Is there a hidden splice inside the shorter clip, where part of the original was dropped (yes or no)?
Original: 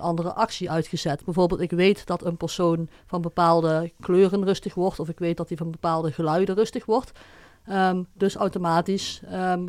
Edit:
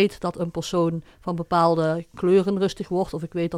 no